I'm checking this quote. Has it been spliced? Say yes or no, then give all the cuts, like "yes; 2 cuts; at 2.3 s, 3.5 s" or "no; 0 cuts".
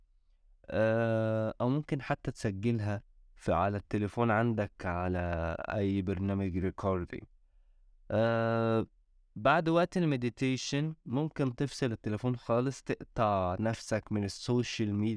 no; 0 cuts